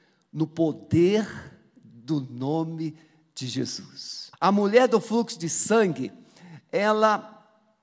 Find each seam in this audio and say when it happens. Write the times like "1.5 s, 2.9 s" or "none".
4.3 s